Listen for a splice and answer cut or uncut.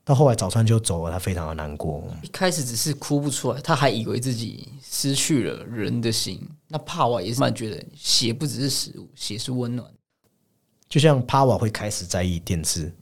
cut